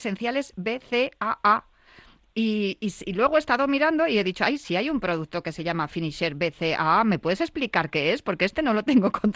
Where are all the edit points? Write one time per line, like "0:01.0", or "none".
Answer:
none